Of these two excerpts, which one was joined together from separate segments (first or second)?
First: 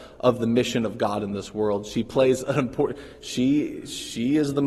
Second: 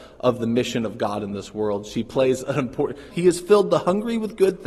second